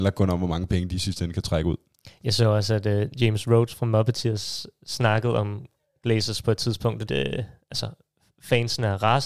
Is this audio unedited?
no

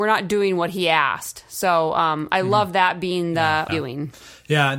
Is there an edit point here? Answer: yes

